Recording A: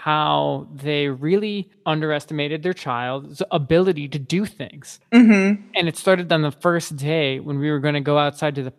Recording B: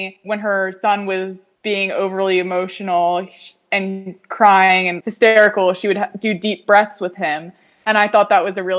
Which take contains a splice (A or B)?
B